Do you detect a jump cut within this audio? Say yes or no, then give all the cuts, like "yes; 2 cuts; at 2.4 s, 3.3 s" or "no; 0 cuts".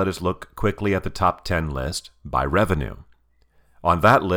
no; 0 cuts